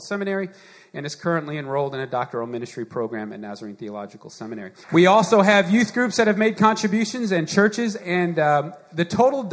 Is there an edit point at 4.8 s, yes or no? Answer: yes